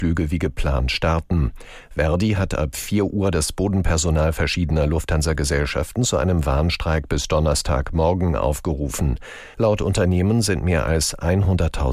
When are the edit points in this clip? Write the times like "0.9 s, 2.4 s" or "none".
9.5 s